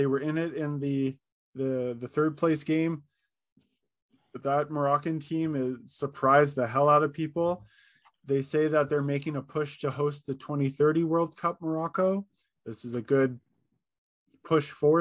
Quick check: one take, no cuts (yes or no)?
yes